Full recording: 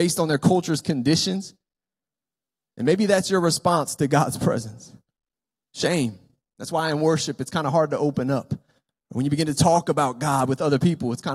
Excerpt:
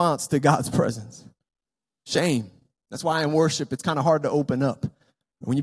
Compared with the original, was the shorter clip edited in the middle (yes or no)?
no